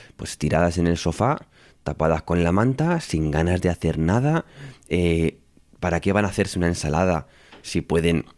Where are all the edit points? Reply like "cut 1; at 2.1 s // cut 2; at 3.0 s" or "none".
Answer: none

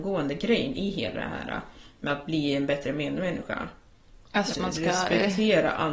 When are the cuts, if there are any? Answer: cut 1; at 4.5 s

